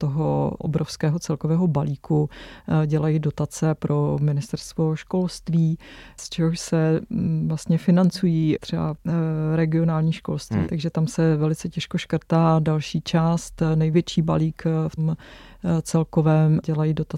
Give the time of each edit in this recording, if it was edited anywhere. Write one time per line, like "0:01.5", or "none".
0:10.6
0:15.0